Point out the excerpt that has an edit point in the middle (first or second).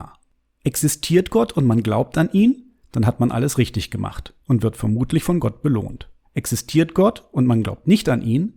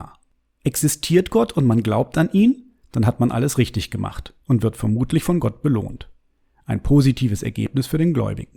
first